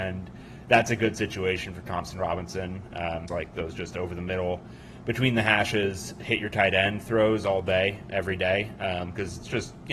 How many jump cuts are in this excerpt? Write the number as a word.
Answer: one